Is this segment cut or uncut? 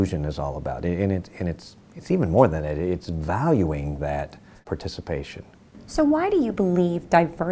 uncut